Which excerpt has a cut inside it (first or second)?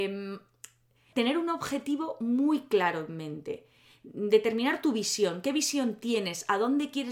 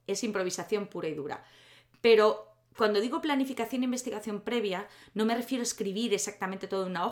first